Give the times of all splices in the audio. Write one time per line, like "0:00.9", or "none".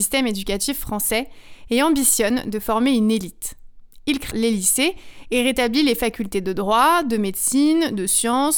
0:04.3